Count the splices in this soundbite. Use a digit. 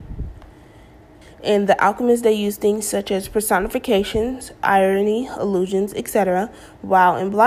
1